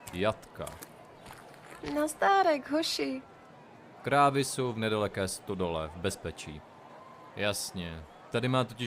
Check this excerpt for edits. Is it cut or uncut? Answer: cut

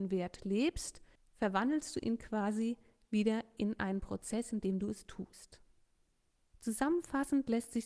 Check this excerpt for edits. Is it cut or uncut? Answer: uncut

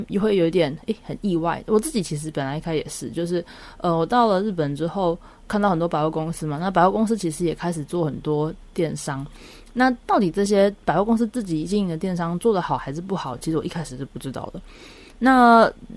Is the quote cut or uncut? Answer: uncut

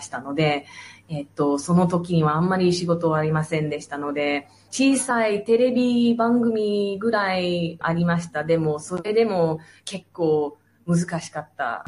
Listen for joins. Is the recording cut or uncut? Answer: cut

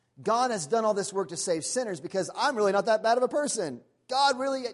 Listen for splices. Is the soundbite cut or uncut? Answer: uncut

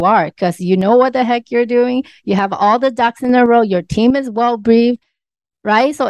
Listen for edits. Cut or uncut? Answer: uncut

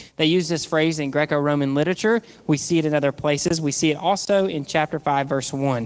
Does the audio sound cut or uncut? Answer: uncut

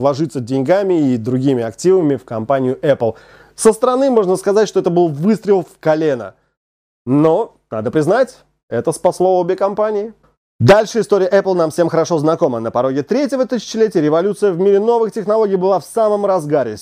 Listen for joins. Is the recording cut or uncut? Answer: uncut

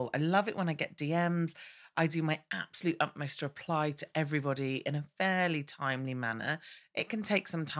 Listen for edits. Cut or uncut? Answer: uncut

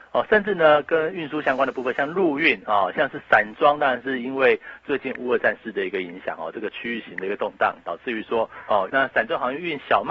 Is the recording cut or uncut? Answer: cut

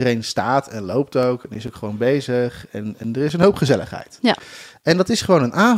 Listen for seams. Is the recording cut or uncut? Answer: uncut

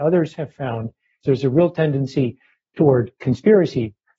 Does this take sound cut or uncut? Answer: cut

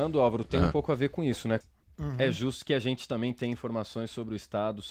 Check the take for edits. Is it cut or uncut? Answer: cut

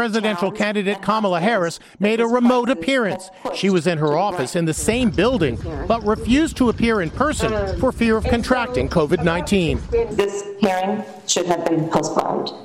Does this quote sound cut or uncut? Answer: uncut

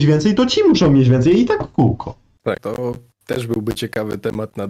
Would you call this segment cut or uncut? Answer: cut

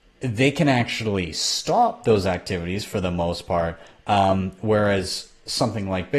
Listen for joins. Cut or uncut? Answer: uncut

